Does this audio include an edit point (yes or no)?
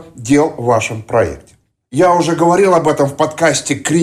yes